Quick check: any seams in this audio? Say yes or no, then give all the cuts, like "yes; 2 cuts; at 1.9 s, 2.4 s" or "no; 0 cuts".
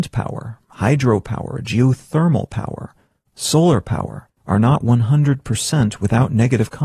no; 0 cuts